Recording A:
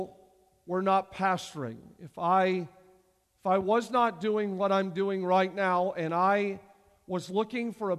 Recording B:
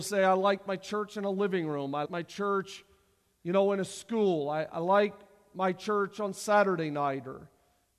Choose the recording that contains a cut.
B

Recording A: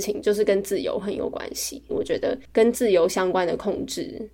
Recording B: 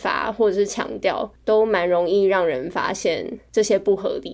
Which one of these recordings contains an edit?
A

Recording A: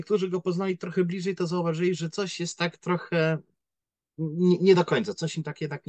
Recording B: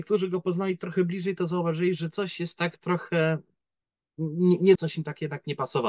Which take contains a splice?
B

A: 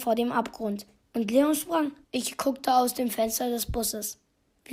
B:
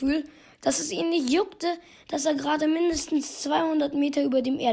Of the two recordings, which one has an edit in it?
A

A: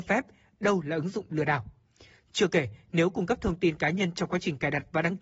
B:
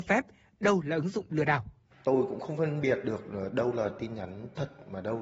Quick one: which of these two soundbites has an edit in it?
B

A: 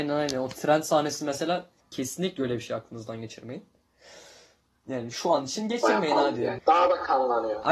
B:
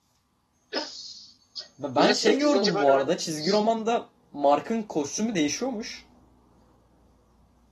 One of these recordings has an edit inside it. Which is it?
A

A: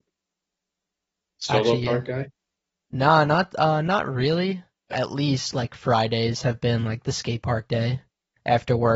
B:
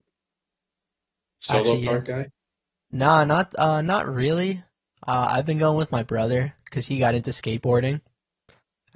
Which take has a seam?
A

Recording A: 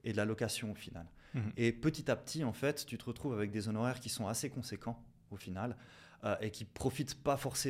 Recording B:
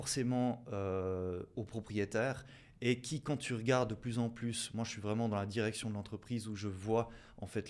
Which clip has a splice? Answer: A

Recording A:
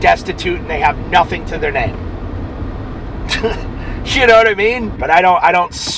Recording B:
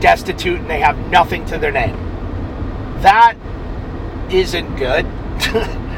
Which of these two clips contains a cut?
A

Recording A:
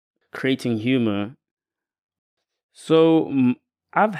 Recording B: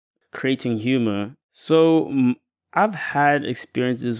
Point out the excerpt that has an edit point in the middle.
B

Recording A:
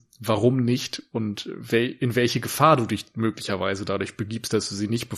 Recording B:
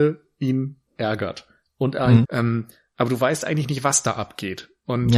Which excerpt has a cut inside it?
B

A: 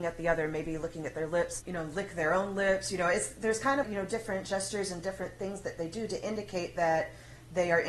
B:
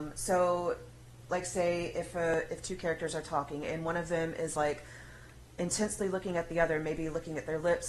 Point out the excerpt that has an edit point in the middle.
A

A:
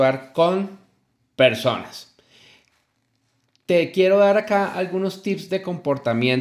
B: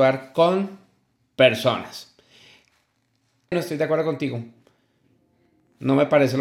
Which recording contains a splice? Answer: B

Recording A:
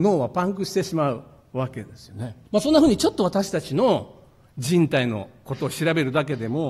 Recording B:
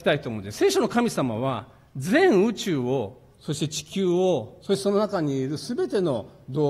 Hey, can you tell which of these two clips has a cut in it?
A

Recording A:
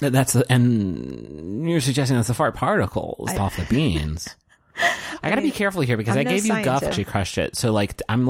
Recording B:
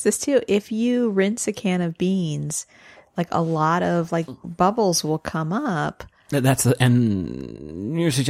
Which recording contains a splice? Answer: A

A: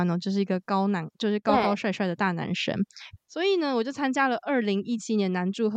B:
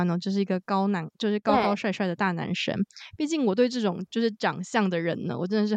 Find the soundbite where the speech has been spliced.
A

